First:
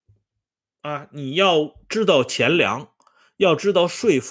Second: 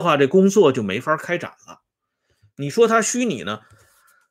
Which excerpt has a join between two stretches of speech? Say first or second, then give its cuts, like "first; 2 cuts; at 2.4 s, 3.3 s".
second; 1 cut; at 2.5 s